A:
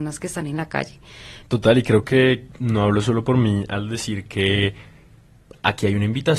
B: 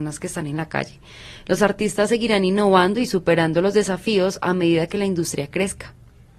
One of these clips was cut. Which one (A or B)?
A